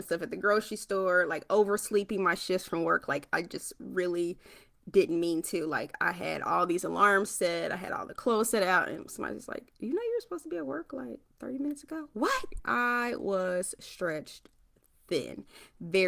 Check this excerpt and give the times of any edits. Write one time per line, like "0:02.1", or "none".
0:11.3
0:12.6

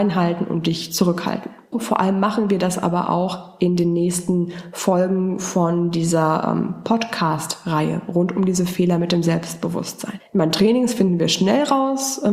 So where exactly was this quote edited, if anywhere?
0:01.7
0:10.2

